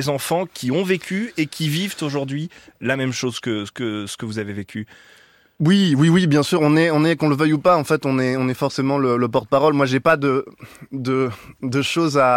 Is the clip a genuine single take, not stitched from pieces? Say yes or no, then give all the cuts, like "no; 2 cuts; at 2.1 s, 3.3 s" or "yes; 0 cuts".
yes; 0 cuts